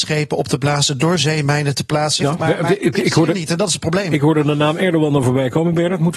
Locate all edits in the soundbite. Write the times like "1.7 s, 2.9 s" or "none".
2.2 s